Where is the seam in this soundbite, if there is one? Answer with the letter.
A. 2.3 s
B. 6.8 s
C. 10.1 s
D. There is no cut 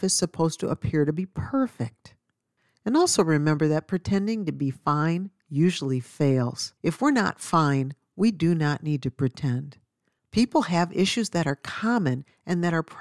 B